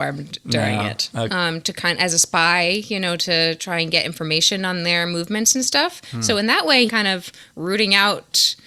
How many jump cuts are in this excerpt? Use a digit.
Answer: 2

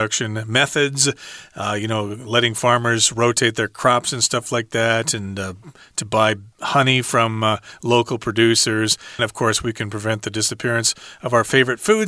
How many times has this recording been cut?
2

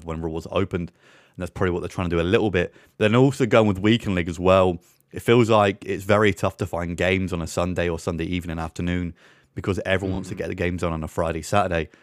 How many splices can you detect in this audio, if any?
0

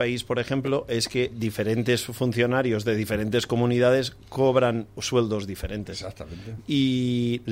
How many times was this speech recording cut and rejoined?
2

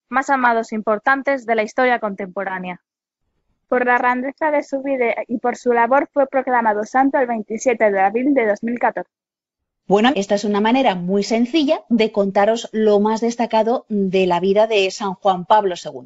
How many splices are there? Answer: 1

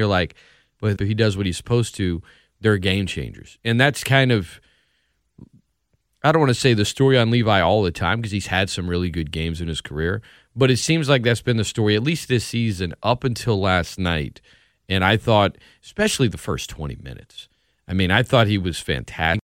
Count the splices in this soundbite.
1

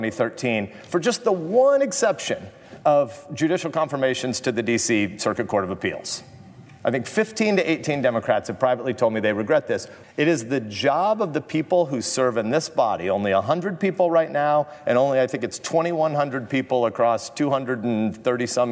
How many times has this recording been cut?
1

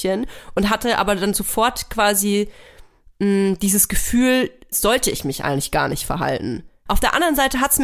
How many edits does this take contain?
2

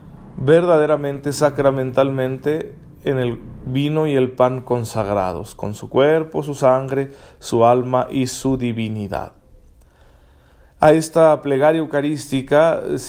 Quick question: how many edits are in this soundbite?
0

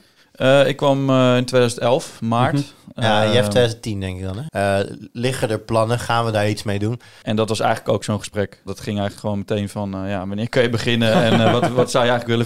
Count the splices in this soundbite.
3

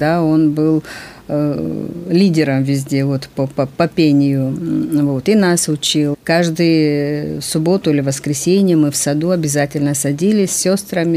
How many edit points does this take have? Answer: 1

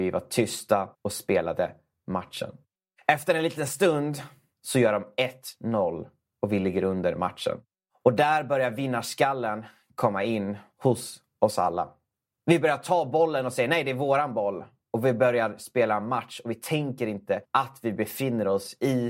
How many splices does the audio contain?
1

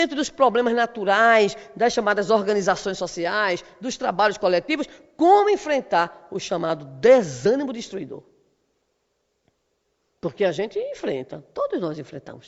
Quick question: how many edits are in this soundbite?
0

